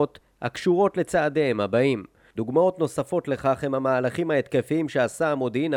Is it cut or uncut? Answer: cut